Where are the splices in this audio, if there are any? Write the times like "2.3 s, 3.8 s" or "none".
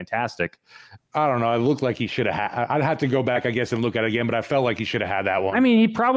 1.0 s